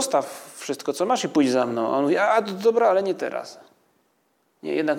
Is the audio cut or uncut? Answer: uncut